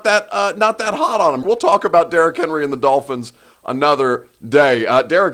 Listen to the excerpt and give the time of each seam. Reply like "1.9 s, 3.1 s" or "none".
1.4 s